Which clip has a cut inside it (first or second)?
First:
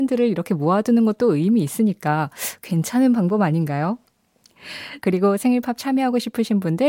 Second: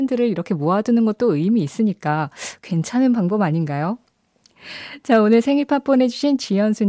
first